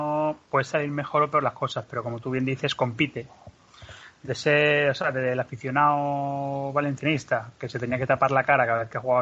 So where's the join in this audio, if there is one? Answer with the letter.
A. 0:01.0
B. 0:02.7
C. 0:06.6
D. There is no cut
D